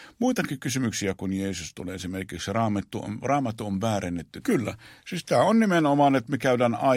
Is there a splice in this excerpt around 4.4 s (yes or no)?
yes